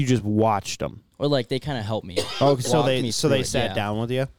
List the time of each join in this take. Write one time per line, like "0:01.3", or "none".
0:01.1

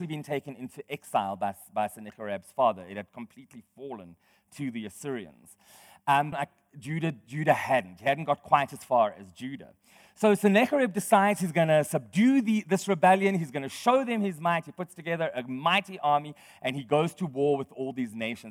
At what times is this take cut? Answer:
0:06.3

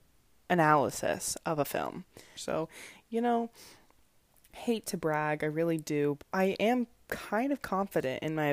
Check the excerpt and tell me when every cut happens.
0:02.4
0:06.2

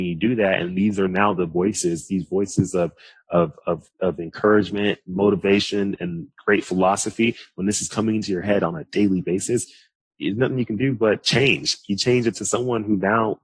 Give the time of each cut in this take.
0:06.0

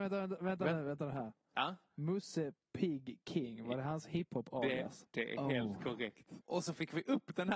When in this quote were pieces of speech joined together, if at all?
0:05.1
0:06.4

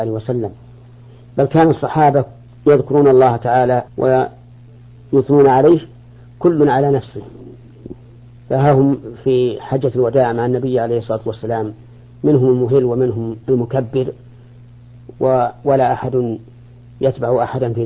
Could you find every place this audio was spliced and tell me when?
0:03.9
0:13.4

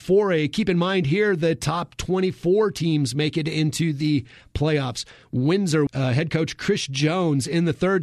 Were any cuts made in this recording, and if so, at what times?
0:05.9

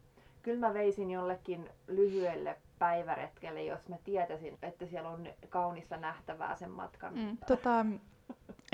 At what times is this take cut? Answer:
0:04.5
0:07.4

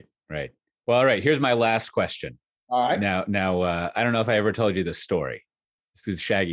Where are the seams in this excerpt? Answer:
none

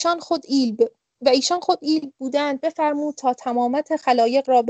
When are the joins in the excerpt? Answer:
0:01.1

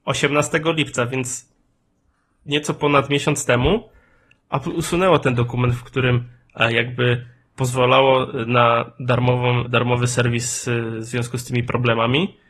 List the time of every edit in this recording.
0:09.7

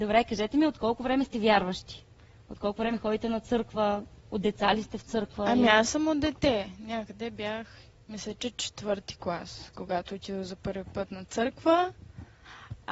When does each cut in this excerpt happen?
none

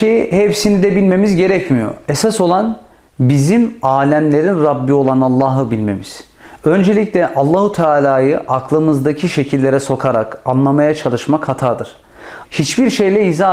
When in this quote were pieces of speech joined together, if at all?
0:12.5

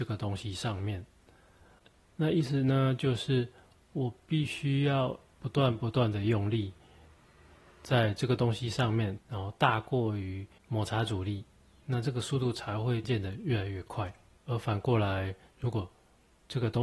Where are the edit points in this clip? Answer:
0:09.2
0:13.0
0:14.4

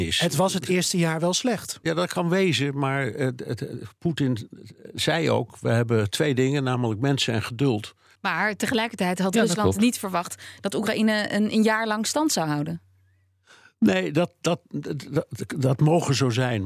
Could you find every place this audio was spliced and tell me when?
0:08.2

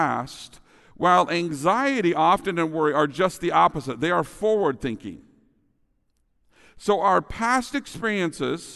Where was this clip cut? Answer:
none

